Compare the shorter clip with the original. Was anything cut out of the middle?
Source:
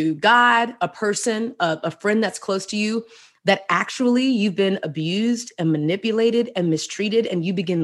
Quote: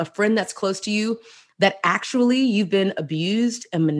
no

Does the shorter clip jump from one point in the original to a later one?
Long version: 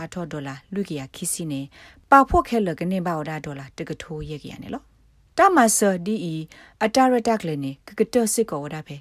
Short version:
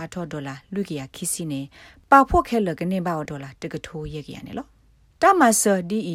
yes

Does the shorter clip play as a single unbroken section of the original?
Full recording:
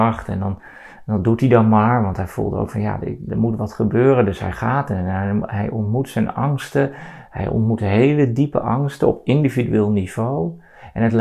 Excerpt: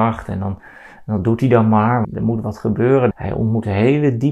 no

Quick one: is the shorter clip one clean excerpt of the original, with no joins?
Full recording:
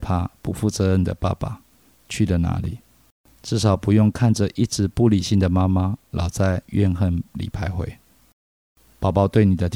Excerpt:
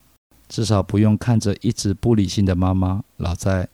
yes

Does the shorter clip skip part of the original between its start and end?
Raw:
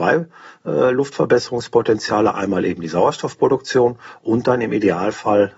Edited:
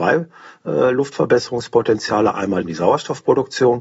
yes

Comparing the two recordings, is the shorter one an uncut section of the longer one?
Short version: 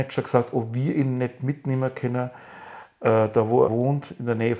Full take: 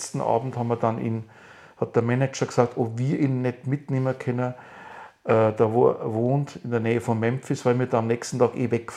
no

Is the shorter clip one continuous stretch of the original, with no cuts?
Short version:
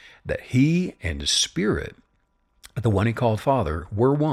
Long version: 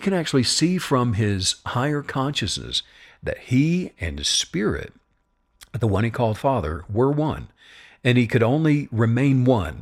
yes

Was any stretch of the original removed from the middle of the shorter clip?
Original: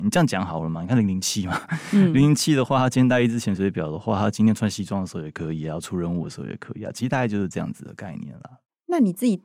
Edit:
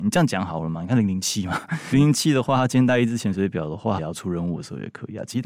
yes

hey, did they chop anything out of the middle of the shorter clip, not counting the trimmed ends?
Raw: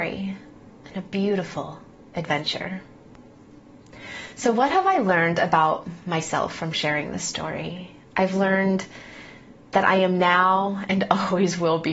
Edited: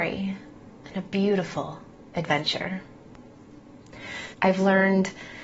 yes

